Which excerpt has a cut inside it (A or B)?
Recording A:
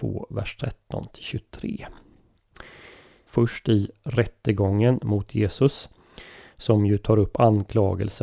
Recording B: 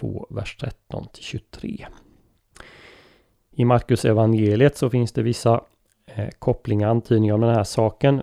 A